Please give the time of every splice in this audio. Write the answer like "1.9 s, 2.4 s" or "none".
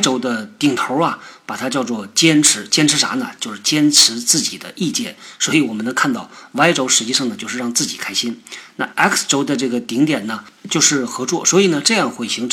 none

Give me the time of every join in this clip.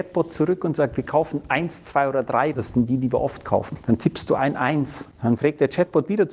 2.5 s

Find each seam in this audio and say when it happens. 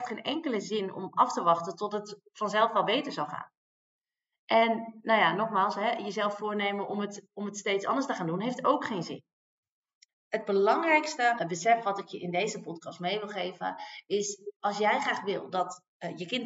11.4 s

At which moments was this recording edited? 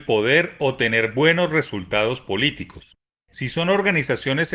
none

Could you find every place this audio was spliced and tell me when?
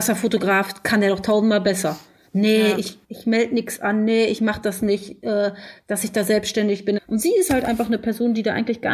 3.0 s, 7.0 s

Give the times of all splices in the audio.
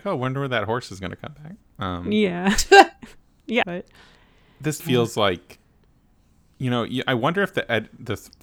3.6 s, 4.8 s

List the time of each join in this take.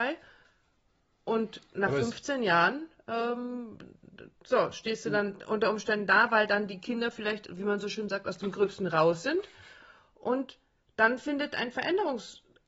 4.3 s

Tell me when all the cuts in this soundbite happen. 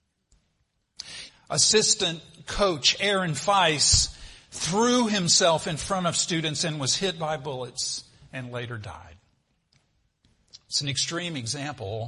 1.3 s

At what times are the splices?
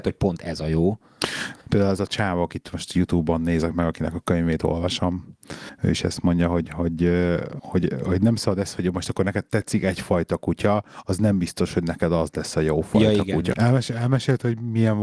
1.7 s, 13.5 s

